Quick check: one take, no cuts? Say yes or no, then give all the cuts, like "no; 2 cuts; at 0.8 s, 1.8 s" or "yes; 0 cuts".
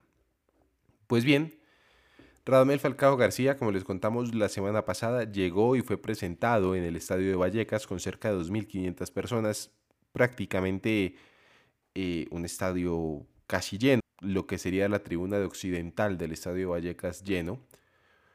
no; 1 cut; at 14.0 s